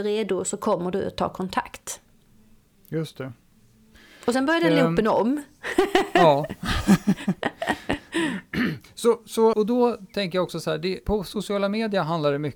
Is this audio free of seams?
no; 2 cuts; at 9.5 s, 11.0 s

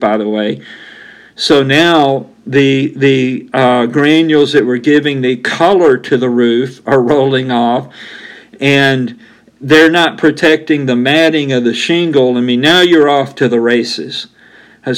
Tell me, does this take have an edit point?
no; 0 cuts

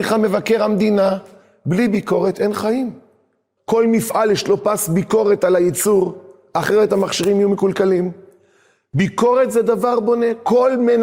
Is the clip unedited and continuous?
no; 1 cut; at 3.6 s

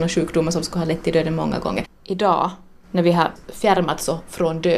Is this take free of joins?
no; 1 cut; at 1.8 s

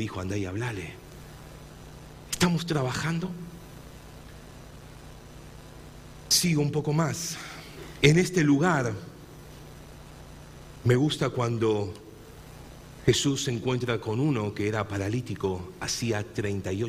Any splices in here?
no; 0 cuts

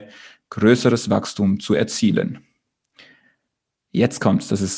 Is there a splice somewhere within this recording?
no; 0 cuts

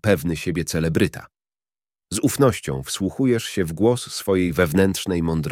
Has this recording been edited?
no; 0 cuts

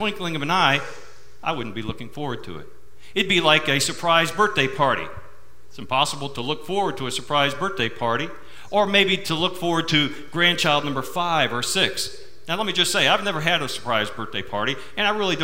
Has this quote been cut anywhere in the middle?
no; 0 cuts

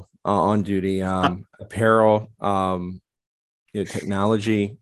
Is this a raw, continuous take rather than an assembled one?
yes; 0 cuts

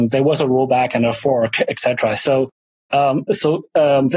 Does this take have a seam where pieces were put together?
no; 0 cuts

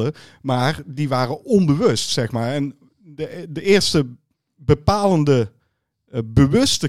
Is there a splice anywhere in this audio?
no; 0 cuts

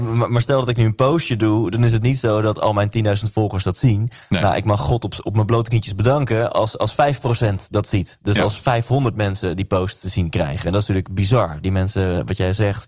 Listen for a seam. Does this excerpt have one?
no; 0 cuts

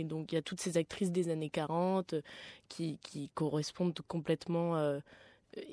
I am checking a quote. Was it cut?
yes; 1 cut; at 3.0 s

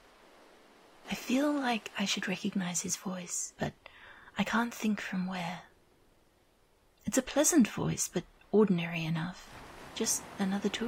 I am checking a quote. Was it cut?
yes; 1 cut; at 1.0 s

